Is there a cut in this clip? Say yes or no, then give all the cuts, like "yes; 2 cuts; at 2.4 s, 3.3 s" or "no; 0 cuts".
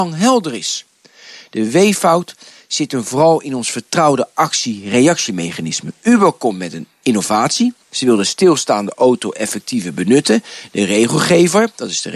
no; 0 cuts